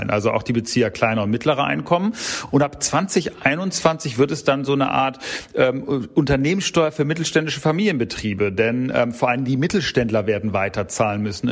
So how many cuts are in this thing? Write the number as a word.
zero